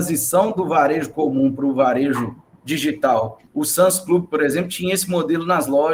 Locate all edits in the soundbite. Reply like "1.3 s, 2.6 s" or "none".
3.5 s